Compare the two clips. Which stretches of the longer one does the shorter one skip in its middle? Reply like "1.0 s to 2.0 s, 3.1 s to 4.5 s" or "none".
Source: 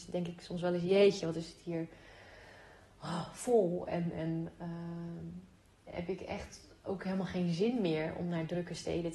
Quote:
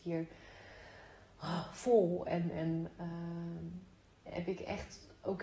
none